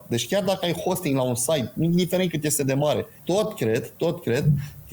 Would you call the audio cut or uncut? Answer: cut